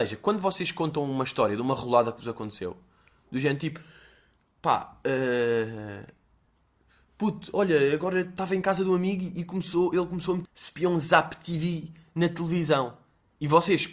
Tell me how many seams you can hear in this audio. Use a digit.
1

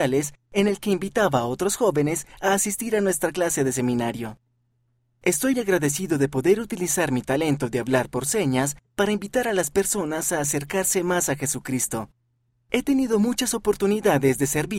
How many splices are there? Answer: 1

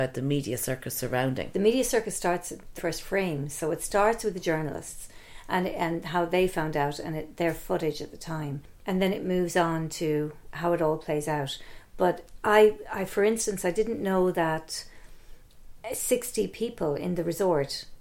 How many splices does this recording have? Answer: 1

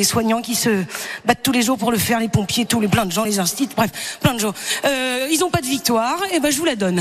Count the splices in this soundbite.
0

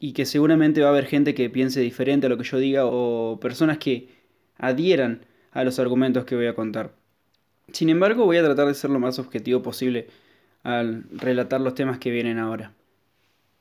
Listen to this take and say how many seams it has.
0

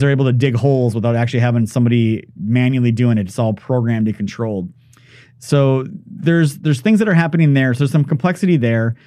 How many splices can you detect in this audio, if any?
0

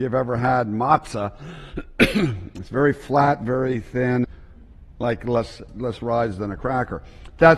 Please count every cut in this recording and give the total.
2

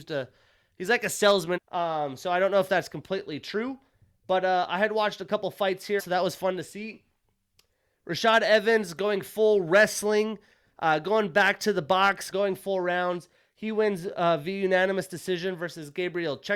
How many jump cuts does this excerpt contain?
3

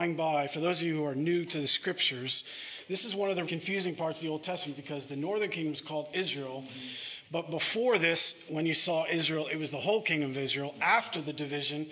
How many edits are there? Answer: 1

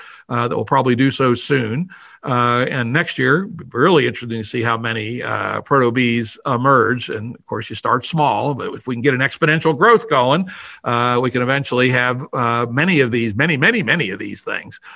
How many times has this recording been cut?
0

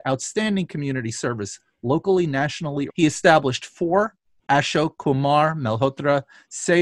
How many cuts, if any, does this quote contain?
1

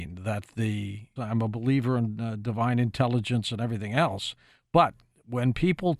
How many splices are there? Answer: 1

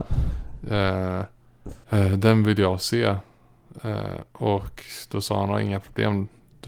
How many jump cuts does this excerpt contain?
1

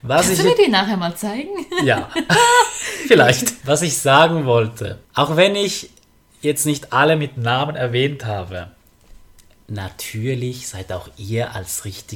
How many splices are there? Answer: 2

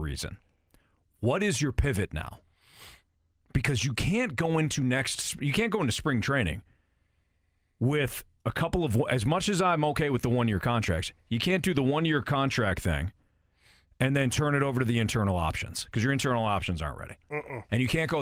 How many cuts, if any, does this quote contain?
1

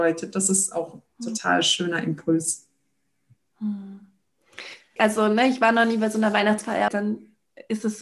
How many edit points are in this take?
2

